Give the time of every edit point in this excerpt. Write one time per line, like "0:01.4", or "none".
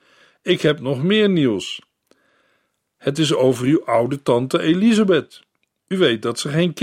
none